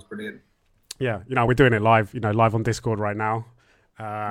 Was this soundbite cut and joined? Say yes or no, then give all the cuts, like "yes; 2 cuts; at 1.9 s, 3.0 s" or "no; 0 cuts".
no; 0 cuts